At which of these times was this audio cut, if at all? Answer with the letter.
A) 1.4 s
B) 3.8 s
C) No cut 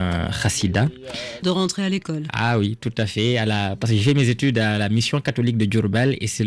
A